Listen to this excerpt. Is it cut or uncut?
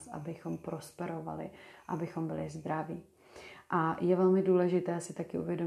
uncut